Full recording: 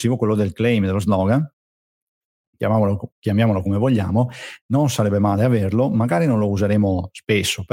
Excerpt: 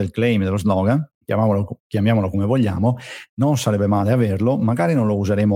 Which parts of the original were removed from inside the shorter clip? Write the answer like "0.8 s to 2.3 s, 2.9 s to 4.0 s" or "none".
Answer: 1.6 s to 2.5 s